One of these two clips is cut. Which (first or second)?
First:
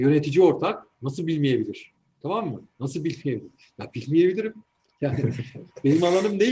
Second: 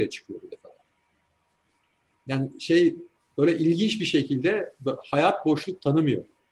first